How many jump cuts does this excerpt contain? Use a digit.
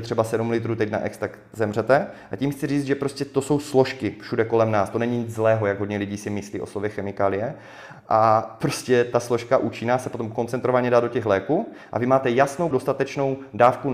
2